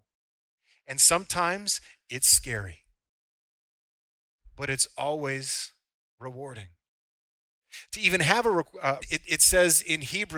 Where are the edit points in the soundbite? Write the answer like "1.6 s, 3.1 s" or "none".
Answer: 7.9 s, 9.0 s